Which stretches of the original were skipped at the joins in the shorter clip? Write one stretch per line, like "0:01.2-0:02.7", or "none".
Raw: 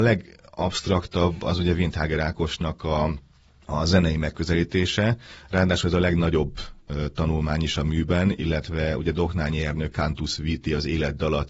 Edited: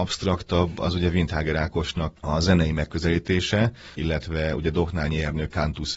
0:02.8-0:03.6
0:05.4-0:08.4